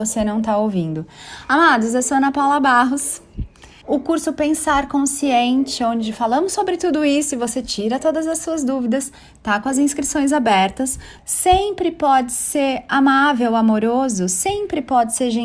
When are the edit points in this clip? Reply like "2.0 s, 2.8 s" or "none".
3.8 s, 11.2 s